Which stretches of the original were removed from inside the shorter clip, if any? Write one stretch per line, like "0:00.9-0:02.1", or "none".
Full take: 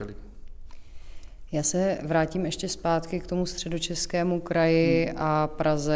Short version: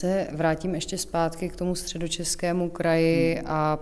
none